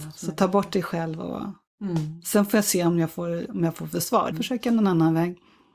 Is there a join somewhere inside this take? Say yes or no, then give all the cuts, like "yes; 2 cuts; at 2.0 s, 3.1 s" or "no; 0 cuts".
yes; 1 cut; at 4.3 s